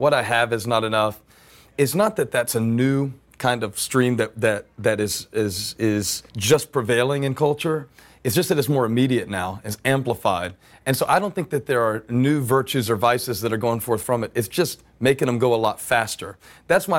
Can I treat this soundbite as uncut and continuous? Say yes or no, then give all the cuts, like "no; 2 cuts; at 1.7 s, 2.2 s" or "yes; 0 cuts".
no; 1 cut; at 6.3 s